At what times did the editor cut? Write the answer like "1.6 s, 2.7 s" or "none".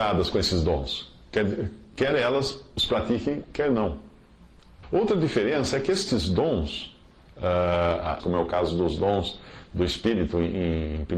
4.8 s, 8.2 s